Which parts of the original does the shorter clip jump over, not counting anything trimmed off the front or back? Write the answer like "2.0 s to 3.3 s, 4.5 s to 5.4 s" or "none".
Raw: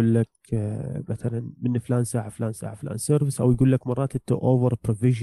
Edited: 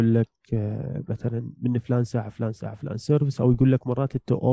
none